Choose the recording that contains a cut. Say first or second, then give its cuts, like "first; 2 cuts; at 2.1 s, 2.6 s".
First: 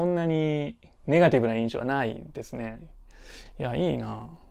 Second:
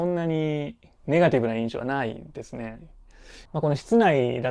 second; 1 cut; at 3.5 s